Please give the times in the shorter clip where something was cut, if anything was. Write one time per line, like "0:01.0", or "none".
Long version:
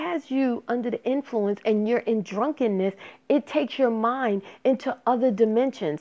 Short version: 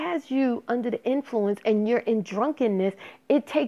none